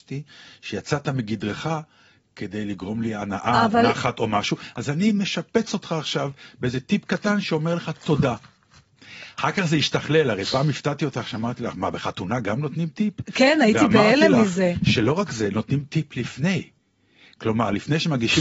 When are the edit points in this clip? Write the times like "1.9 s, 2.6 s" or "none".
none